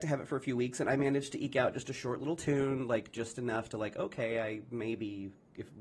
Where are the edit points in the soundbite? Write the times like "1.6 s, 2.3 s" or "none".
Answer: none